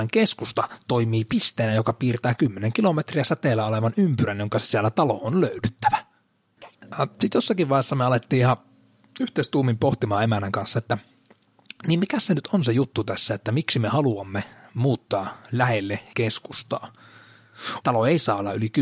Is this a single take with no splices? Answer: no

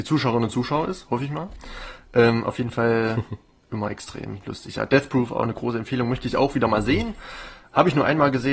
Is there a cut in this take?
no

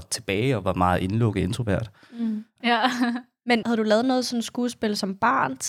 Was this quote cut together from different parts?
yes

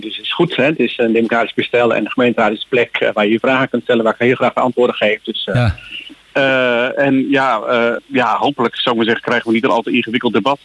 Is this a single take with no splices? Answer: no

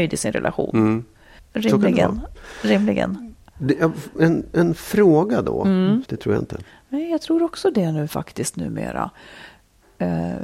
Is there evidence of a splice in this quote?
yes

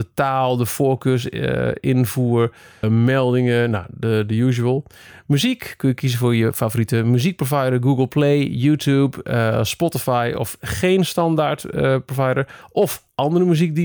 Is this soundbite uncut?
no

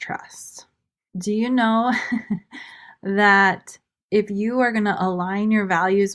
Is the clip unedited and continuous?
no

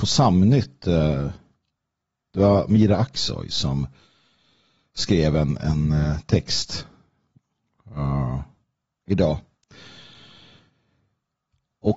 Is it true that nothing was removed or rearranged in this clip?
yes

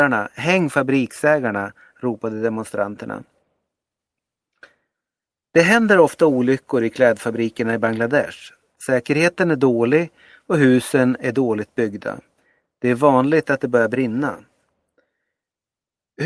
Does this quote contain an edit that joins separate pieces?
no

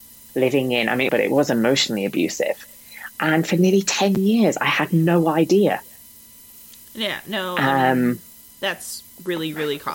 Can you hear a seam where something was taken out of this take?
yes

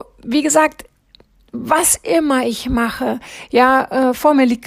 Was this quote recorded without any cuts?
yes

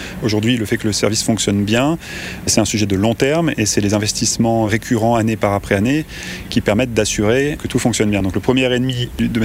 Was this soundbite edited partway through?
no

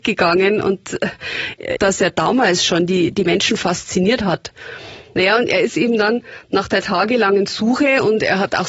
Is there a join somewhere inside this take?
yes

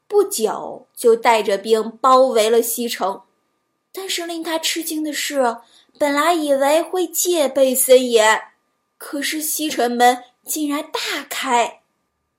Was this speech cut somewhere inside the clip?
yes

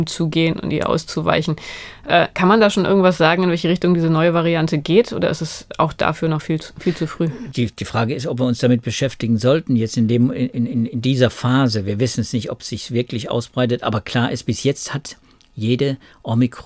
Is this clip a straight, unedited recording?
yes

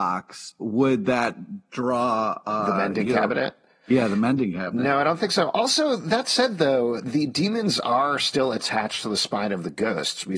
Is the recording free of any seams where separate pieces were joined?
yes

